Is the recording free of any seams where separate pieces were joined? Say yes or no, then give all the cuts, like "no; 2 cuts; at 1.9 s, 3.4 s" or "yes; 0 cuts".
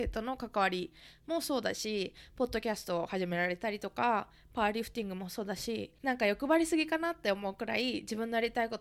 no; 1 cut; at 6.0 s